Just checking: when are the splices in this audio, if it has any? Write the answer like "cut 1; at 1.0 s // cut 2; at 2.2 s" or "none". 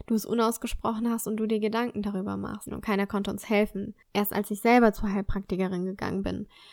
cut 1; at 2.7 s // cut 2; at 4.0 s